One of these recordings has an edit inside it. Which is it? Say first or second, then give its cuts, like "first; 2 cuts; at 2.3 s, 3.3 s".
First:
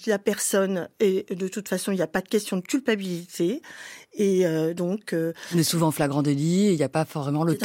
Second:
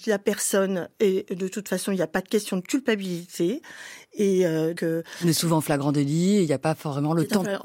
second; 1 cut; at 4.8 s